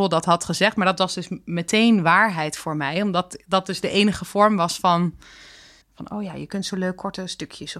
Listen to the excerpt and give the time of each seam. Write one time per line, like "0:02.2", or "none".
0:05.8